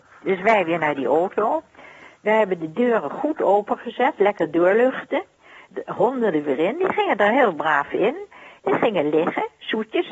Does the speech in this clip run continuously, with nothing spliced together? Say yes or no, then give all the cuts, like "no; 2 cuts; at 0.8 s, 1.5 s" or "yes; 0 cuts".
yes; 0 cuts